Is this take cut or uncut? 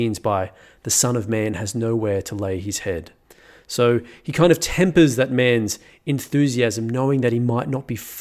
uncut